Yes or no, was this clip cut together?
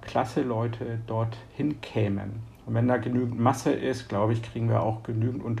yes